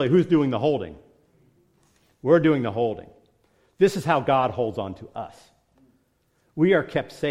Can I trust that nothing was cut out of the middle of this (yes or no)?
yes